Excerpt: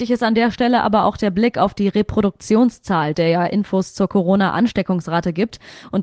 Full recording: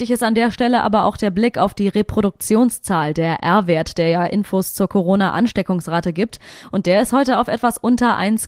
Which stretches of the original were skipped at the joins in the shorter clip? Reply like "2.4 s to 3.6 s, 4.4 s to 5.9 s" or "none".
3.1 s to 3.9 s